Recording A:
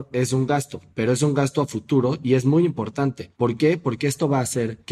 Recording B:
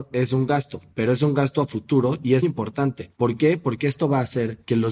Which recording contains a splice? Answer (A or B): B